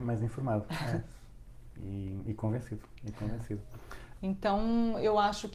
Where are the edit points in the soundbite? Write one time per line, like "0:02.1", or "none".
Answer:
0:04.2